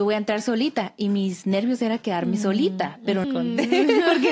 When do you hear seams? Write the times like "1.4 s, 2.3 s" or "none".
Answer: 3.2 s